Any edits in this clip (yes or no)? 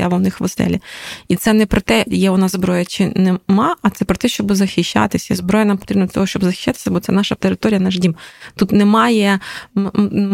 yes